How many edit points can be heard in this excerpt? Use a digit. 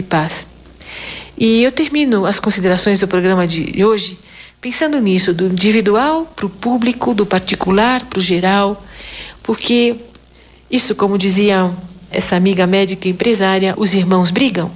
2